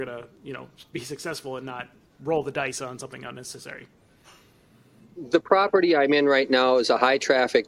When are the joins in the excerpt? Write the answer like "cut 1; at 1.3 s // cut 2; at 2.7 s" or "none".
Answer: none